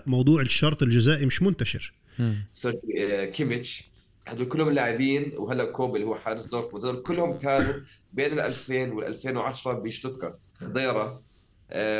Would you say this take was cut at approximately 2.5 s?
yes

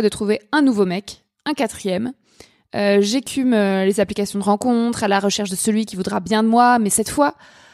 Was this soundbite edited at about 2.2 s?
no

